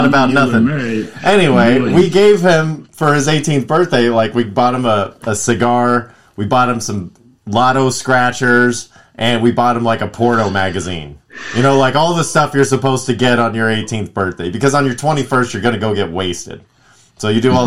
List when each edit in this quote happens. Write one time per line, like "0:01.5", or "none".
none